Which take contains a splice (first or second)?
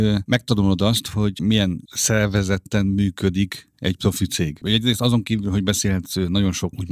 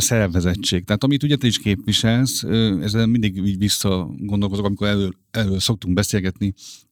first